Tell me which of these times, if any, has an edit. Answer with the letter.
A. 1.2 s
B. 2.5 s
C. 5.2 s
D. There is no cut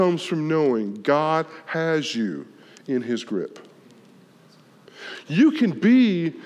D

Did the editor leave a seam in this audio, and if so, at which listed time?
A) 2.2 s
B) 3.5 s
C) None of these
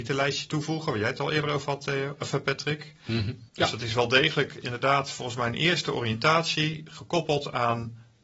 B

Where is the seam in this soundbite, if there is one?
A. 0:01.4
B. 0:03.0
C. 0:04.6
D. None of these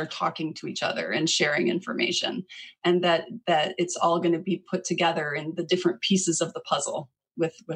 D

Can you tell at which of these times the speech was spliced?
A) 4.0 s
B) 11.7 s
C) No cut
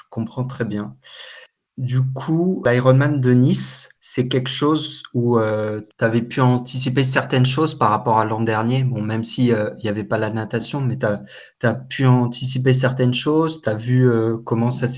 A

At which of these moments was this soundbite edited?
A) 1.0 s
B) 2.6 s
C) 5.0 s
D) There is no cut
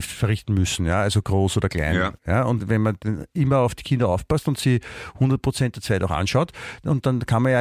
B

